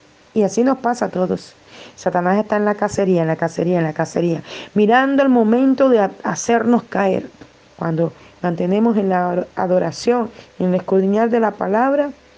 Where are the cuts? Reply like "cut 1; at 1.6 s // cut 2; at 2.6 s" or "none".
cut 1; at 7.7 s // cut 2; at 10.5 s